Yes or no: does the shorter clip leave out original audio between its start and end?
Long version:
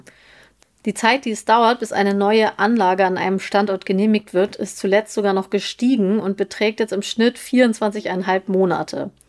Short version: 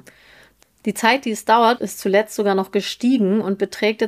yes